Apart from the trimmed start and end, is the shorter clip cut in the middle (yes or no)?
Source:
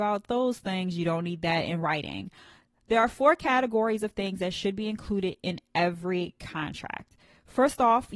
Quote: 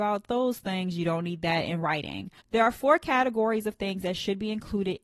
yes